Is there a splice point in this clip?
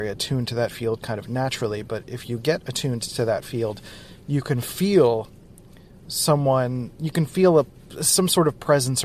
no; 0 cuts

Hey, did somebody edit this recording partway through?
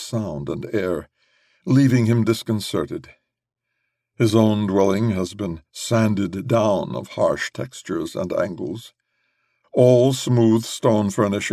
no; 0 cuts

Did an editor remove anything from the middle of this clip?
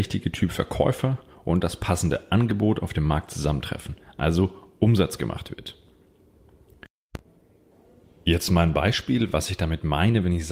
no; 0 cuts

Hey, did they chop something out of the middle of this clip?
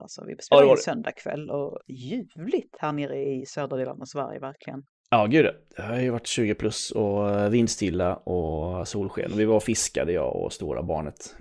no; 0 cuts

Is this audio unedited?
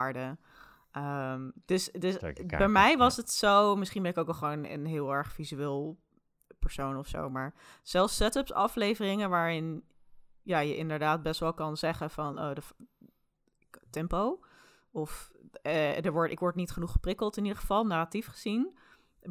yes; 0 cuts

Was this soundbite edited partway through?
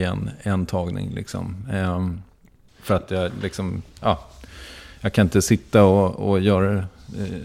yes; 1 cut; at 2.7 s

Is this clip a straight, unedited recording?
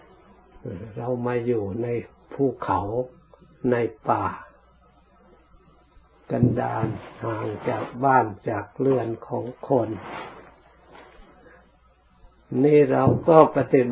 yes; 0 cuts

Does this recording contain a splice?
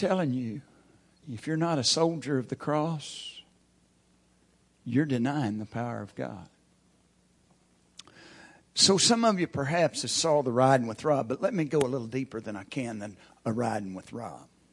no; 0 cuts

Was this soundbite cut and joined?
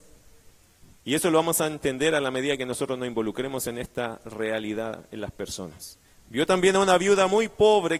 yes; 2 cuts; at 0.9 s, 6.1 s

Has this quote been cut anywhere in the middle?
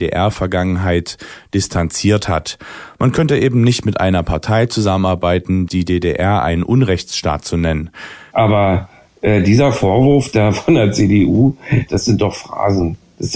yes; 3 cuts; at 5.7 s, 8.3 s, 11.9 s

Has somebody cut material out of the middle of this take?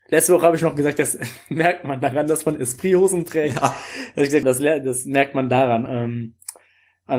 yes; 2 cuts; at 4.4 s, 5.9 s

